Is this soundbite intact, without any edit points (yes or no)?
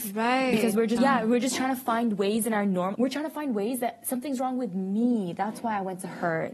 no